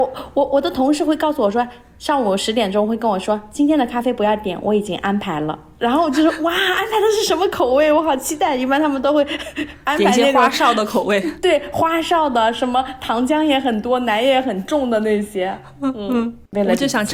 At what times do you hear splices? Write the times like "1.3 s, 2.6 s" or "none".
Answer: none